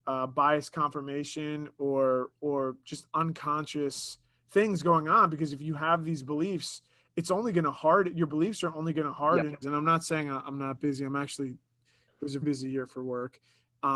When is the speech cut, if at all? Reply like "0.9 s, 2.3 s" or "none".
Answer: 9.6 s, 12.4 s